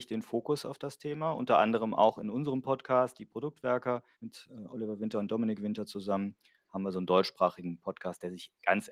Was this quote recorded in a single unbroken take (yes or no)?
no